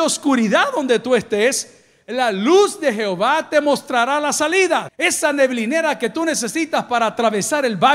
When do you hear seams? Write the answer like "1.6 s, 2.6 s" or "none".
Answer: 4.9 s